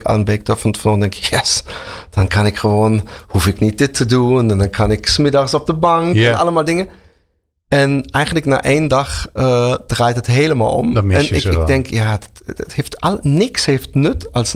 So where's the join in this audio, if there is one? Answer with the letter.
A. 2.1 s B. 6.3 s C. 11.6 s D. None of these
D